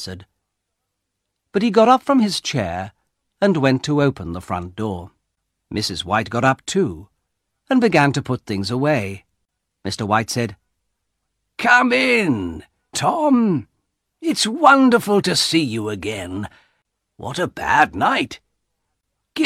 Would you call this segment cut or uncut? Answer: cut